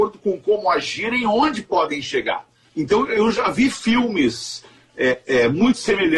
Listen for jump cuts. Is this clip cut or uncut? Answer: uncut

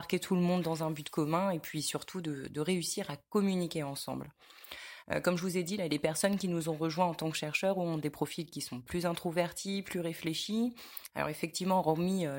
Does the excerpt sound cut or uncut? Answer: cut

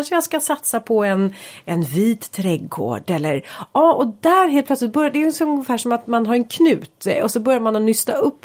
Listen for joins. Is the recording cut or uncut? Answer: uncut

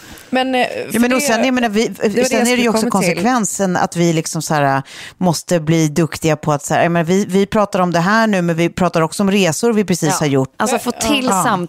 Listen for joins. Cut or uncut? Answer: cut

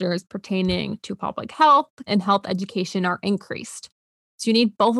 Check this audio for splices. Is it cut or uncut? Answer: cut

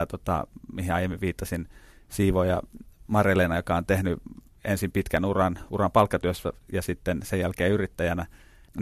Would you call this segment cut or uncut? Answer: uncut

